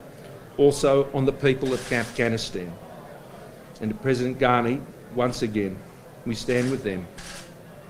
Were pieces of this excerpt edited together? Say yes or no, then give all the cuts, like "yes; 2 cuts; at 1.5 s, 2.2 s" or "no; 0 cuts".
no; 0 cuts